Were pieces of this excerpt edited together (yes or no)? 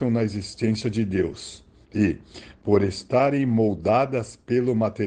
no